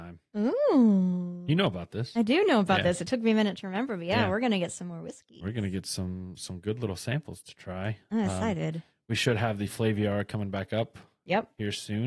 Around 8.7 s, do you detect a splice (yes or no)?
no